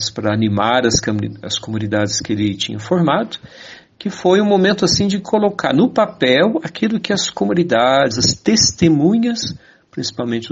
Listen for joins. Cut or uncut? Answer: cut